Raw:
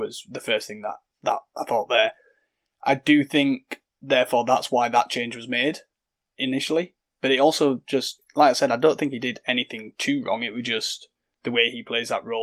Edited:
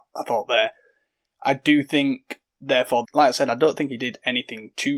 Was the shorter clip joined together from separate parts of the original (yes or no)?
yes